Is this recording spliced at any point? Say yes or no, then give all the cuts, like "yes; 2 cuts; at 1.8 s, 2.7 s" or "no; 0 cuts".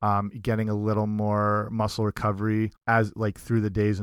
yes; 1 cut; at 2.8 s